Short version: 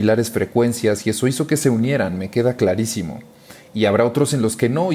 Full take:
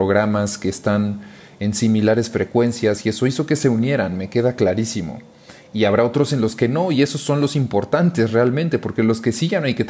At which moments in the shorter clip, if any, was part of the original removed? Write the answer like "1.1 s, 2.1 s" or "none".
none